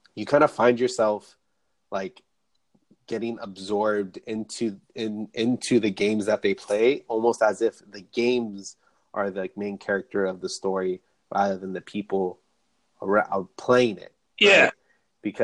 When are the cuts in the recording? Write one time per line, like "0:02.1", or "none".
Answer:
none